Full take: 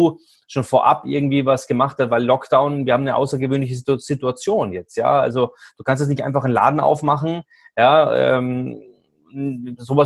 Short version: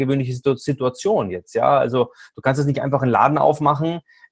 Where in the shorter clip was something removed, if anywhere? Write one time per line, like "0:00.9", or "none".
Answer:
none